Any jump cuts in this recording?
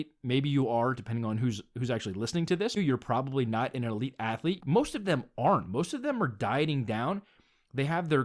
yes; 2 cuts; at 2.8 s, 4.6 s

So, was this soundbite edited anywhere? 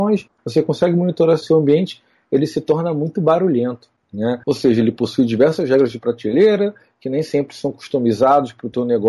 yes; 1 cut; at 4.4 s

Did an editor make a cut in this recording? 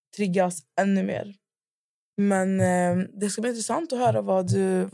no; 0 cuts

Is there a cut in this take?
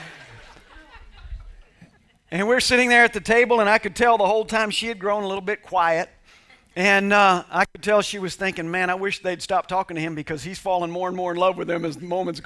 no; 0 cuts

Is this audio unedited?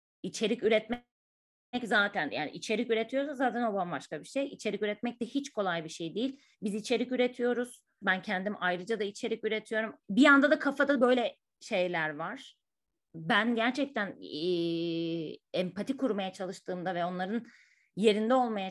no; 2 cuts; at 8.0 s, 10.0 s

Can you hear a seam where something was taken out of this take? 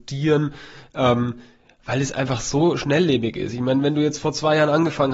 no; 0 cuts

